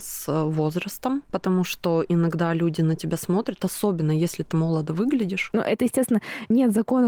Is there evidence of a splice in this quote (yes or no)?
yes